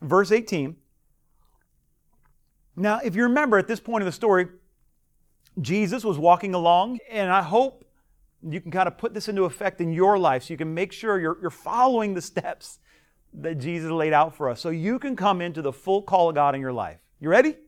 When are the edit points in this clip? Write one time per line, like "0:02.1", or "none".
0:07.0